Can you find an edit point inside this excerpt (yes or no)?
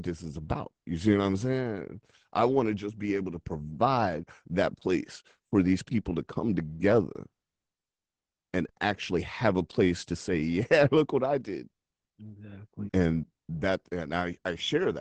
yes